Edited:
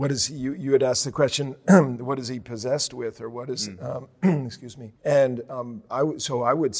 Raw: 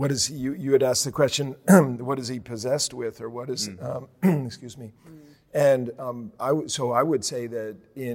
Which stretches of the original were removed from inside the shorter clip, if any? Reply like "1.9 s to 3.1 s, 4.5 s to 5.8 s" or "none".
5.0 s to 5.4 s